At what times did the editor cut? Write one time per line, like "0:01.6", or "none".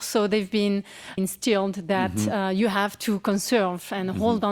0:01.2